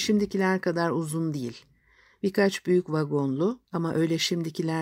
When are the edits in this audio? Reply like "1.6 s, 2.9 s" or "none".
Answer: none